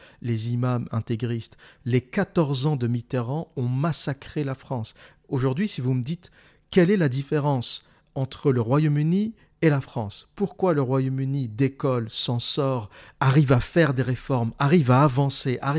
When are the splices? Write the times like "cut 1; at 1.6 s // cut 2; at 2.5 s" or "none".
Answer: cut 1; at 1.8 s